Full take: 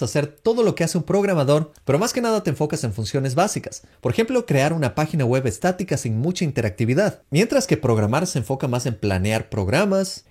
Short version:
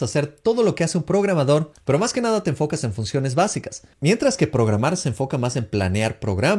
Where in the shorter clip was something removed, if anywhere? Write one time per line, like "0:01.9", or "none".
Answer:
0:03.9

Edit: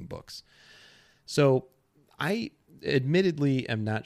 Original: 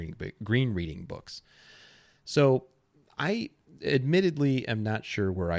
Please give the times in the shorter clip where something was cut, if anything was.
none

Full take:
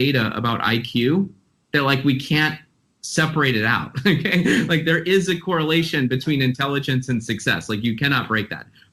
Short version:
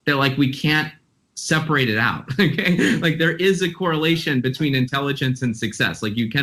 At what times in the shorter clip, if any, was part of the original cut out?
none

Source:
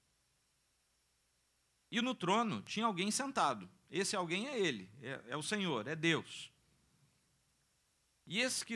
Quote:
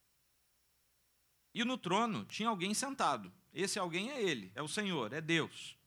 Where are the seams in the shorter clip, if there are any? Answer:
0:04.6

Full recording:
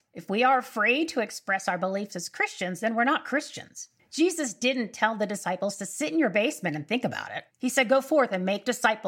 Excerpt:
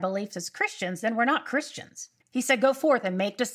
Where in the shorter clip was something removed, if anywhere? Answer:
0:02.2

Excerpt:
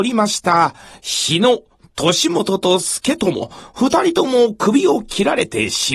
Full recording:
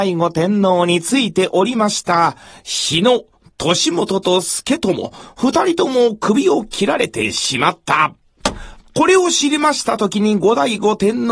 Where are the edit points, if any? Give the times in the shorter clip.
none

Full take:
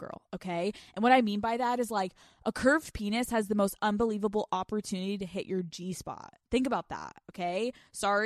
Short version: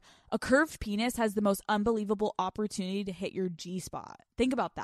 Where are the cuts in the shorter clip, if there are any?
none

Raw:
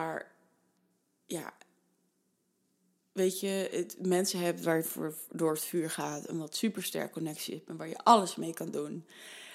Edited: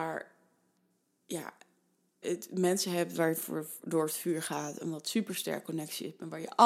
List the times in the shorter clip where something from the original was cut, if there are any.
0:02.2

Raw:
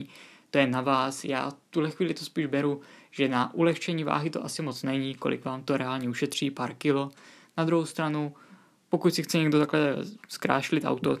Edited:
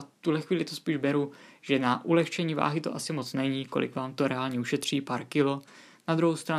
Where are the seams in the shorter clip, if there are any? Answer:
none

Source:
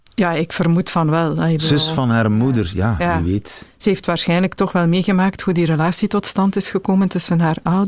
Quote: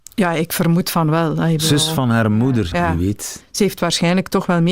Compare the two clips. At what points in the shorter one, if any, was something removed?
0:02.7

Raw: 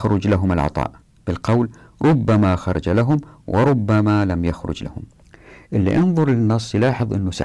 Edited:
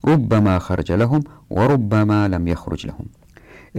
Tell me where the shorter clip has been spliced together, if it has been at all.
none

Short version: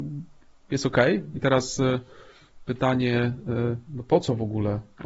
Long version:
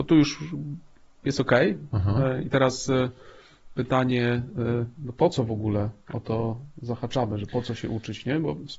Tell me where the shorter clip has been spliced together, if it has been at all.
0:01.3

